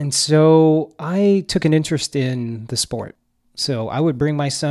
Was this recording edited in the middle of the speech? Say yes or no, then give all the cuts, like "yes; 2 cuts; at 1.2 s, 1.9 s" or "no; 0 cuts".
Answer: yes; 1 cut; at 3.4 s